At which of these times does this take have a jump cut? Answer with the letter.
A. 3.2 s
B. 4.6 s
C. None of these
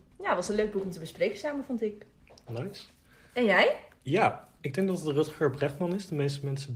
B